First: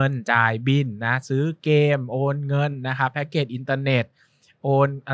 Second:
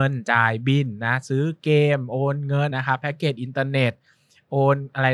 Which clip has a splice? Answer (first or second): second